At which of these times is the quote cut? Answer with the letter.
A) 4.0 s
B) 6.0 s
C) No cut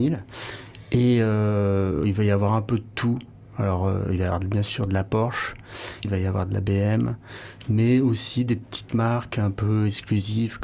B